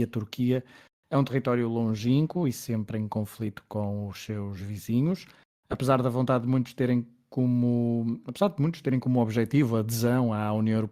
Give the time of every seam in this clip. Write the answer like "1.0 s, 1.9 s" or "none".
none

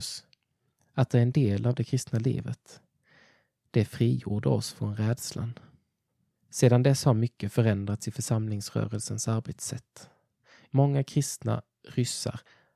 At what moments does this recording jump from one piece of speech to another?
6.3 s, 10.7 s

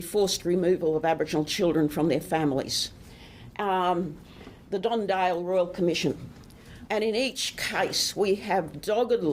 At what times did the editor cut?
6.9 s

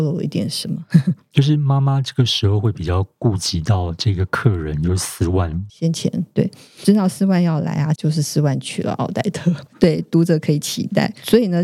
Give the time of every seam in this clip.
5.7 s, 8.0 s, 9.7 s

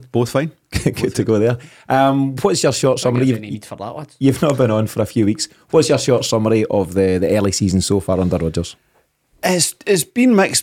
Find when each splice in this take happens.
none

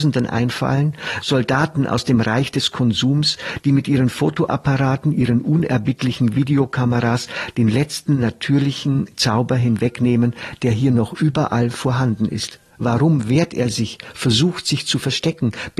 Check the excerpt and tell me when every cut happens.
12.7 s

